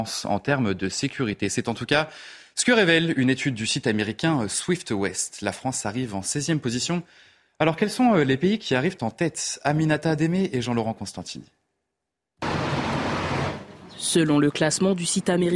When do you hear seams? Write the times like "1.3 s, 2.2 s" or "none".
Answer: none